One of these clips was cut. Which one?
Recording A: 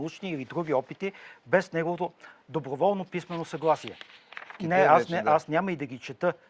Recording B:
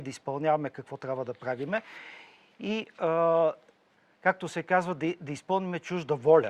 A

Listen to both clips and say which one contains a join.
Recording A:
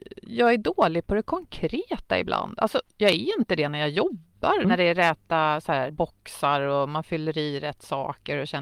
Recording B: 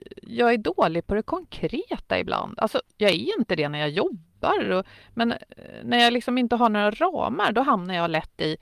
A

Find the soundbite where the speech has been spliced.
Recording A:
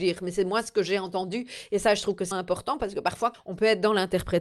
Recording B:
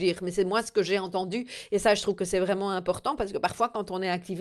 A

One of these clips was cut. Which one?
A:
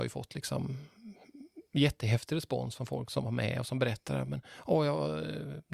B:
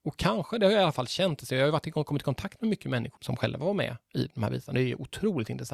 B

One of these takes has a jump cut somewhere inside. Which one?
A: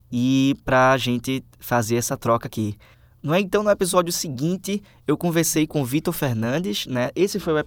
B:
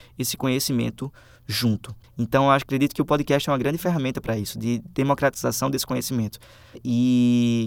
B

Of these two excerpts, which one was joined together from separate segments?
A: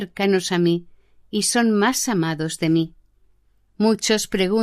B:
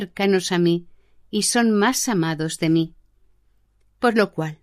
A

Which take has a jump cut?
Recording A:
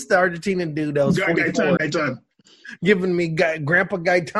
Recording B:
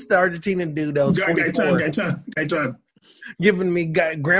A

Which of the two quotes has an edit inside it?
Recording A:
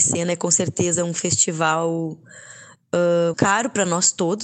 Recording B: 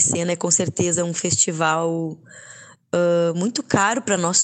A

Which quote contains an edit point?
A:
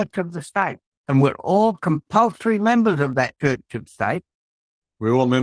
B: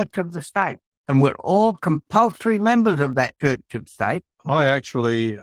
B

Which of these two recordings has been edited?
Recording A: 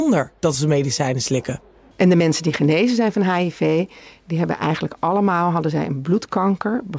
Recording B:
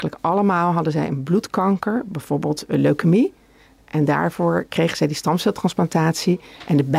A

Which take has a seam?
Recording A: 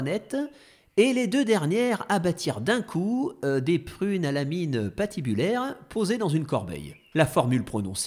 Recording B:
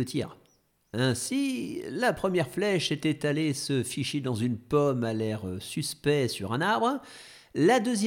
A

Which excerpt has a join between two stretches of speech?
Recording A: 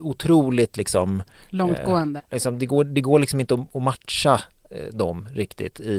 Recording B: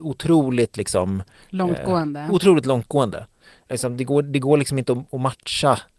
A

